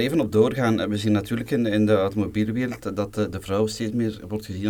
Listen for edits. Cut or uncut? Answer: uncut